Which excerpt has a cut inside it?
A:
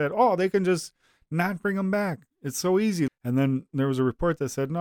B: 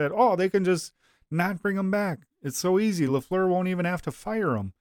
A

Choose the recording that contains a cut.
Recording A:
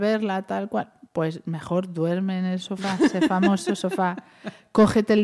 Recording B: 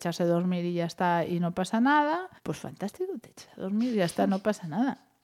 B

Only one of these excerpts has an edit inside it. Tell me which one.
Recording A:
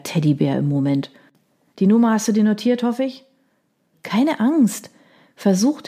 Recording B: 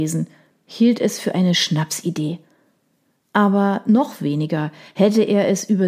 A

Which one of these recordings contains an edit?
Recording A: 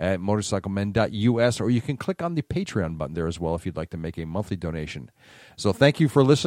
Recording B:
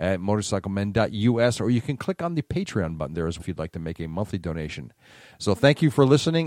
B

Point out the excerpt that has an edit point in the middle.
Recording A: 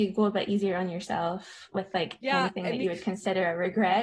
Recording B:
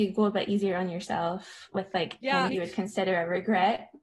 B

